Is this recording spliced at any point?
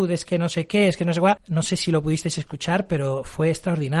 yes; 1 cut; at 1.4 s

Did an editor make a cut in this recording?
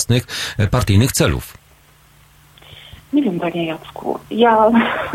no; 0 cuts

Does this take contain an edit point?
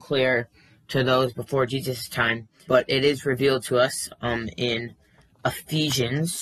yes; 1 cut; at 2.7 s

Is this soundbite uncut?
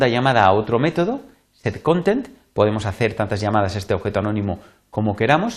yes; 0 cuts

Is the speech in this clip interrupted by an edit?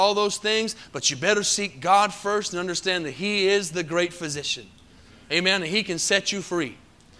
no; 0 cuts

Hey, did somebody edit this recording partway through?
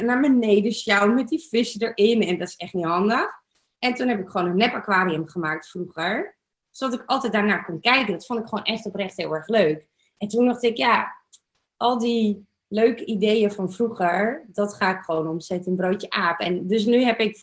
no; 0 cuts

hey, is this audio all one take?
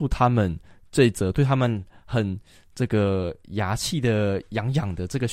yes; 0 cuts

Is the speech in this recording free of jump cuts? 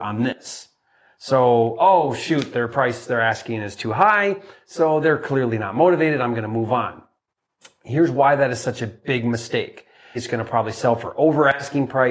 no; 1 cut; at 10.1 s

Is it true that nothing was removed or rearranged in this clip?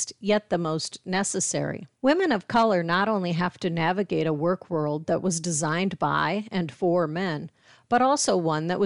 no; 1 cut; at 1.9 s

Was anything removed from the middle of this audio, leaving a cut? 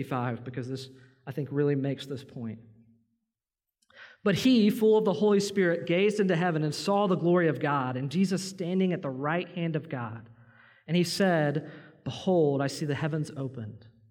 no; 0 cuts

